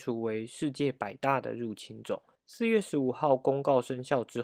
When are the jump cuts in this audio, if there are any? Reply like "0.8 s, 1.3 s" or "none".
2.4 s